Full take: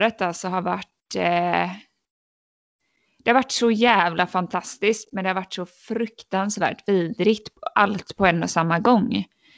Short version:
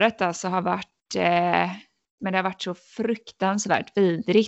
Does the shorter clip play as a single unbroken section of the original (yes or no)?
no